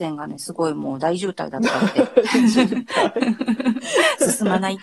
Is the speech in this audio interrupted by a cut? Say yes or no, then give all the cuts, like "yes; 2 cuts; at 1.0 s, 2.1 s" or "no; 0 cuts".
no; 0 cuts